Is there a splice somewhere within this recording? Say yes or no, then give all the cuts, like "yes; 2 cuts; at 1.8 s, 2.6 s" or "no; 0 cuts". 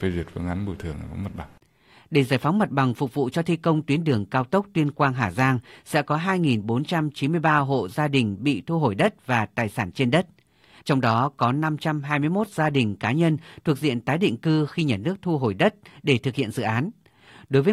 yes; 1 cut; at 10.8 s